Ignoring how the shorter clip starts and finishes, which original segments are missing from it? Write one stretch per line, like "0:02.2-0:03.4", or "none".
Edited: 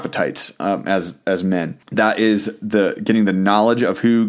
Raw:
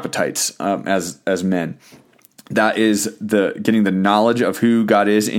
0:01.8-0:02.4